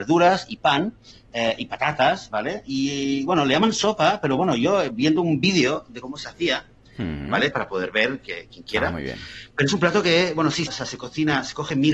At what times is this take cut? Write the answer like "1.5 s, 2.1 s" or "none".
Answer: 7.5 s, 10.7 s